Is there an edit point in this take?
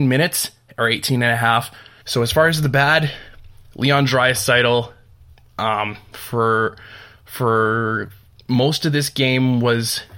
yes; 1 cut; at 2.0 s

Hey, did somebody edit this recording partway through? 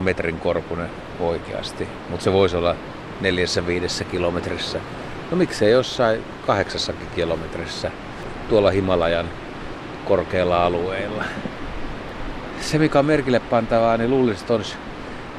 no; 0 cuts

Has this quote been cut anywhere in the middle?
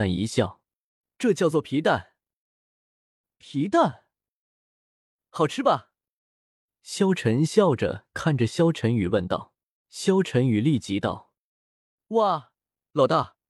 yes; 2 cuts; at 9.8 s, 12.0 s

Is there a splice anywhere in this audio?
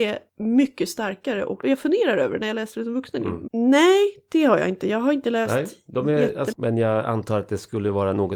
yes; 2 cuts; at 3.5 s, 6.5 s

